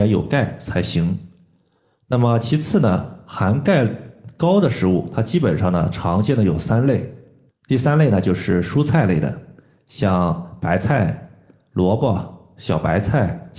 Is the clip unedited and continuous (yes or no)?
no